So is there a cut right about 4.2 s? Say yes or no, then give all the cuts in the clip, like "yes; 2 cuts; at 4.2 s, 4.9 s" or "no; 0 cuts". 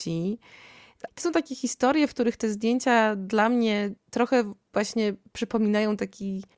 no; 1 cut; at 1.1 s